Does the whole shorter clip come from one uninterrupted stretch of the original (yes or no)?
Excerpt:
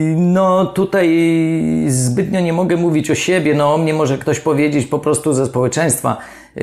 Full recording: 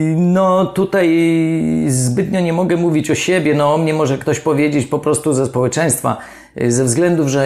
yes